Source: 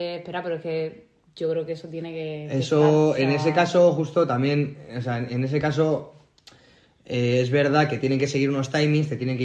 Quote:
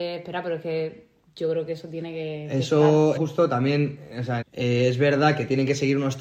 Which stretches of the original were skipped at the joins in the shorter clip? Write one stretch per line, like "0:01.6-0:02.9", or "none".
0:03.2-0:03.9
0:05.2-0:06.9